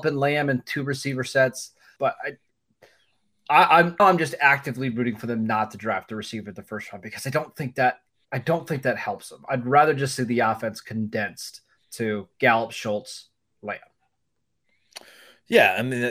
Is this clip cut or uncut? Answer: cut